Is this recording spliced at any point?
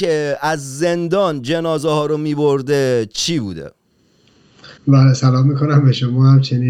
yes; 1 cut; at 4.8 s

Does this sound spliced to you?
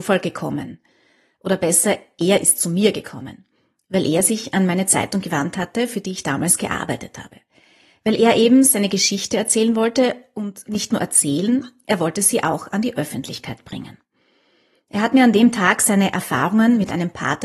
no; 0 cuts

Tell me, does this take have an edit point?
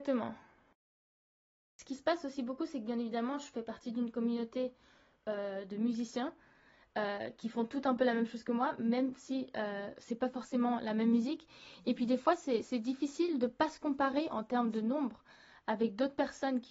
no; 0 cuts

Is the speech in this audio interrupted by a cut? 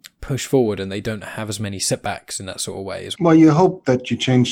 yes; 1 cut; at 3.1 s

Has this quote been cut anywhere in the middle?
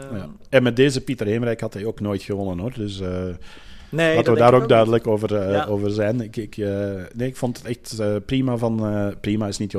no; 0 cuts

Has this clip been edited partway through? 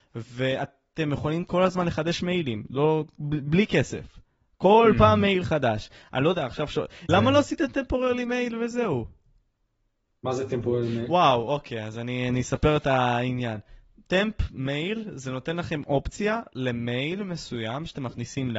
yes; 1 cut; at 7.1 s

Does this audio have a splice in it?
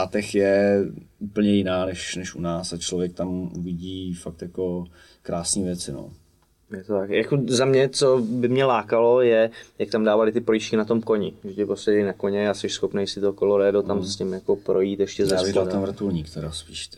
no; 0 cuts

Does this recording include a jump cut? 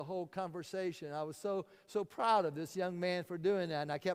no; 0 cuts

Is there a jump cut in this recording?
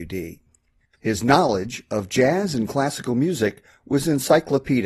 yes; 1 cut; at 0.9 s

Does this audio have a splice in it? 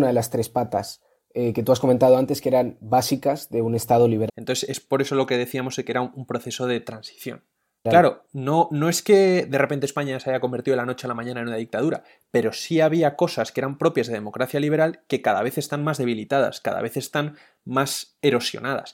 yes; 2 cuts; at 4.3 s, 7.9 s

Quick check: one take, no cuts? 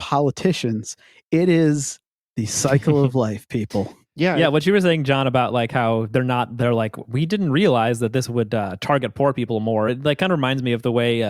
yes; 0 cuts

